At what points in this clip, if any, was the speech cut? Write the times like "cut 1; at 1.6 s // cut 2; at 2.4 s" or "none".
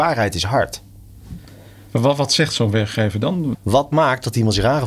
cut 1; at 3.5 s